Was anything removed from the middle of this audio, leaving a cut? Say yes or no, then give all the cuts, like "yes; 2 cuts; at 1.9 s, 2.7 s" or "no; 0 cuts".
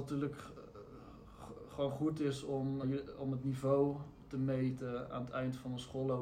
yes; 1 cut; at 2.8 s